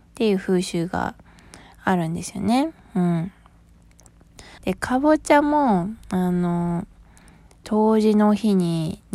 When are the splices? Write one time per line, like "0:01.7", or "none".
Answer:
0:04.6